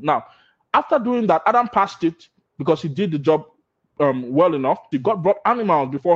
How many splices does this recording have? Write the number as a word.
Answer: one